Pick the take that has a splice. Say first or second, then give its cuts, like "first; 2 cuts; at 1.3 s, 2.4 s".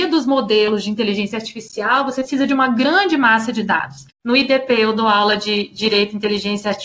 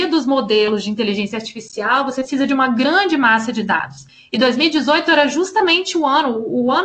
first; 1 cut; at 4.1 s